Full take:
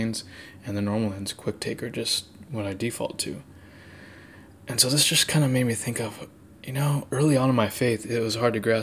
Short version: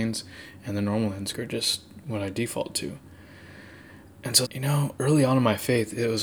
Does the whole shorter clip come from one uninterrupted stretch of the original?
no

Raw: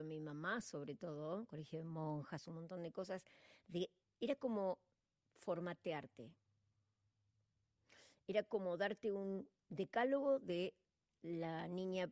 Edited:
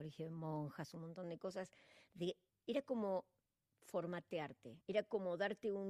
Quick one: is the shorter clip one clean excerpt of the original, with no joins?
no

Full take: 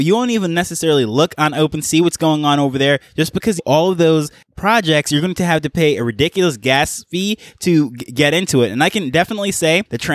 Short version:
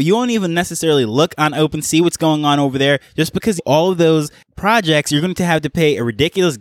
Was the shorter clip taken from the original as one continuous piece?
yes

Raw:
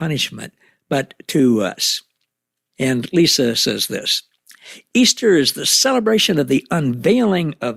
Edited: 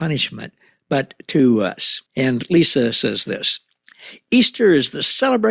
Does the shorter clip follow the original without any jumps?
no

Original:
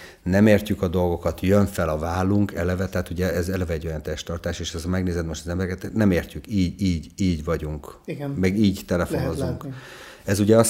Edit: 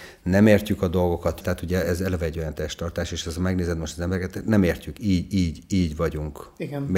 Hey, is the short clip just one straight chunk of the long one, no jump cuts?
no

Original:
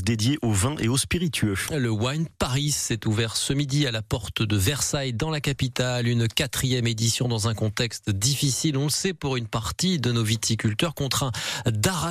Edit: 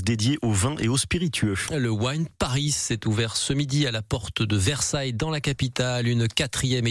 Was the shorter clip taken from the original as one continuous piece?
yes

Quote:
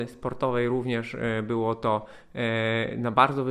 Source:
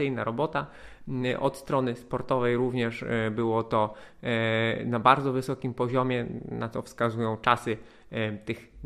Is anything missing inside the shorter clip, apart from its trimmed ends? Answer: no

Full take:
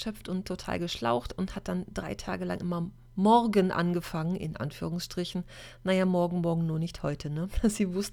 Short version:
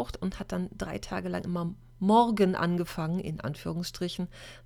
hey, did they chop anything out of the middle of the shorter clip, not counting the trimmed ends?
no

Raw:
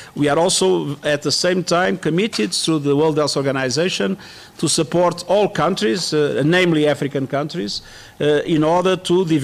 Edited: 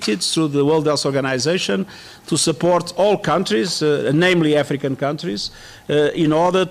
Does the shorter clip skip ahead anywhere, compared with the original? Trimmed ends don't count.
no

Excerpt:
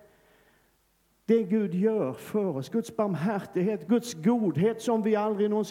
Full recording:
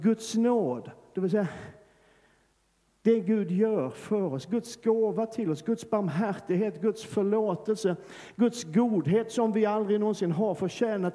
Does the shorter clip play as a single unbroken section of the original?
no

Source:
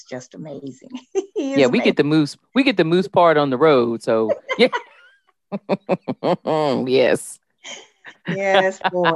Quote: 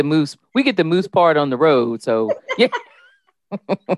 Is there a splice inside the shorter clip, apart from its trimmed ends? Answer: no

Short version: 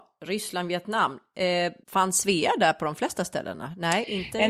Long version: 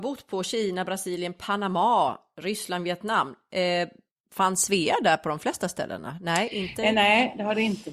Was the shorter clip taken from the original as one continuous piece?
no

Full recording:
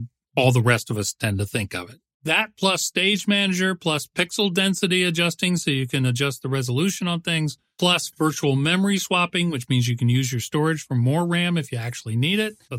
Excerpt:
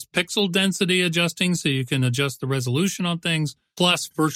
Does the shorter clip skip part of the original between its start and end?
no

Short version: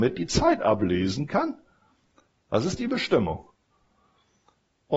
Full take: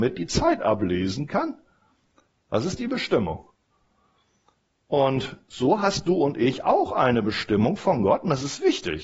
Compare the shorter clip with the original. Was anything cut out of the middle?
no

